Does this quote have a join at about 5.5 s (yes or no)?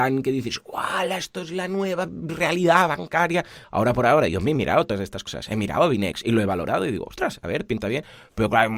no